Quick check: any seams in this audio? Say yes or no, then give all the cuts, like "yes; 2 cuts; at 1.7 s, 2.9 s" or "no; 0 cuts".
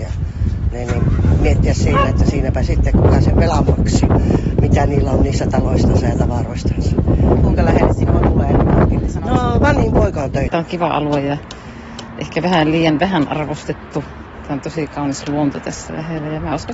yes; 1 cut; at 10.5 s